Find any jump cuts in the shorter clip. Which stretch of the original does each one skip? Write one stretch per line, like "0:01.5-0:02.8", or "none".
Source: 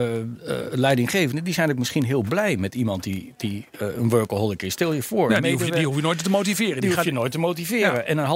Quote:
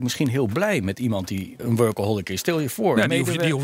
0:03.4-0:03.9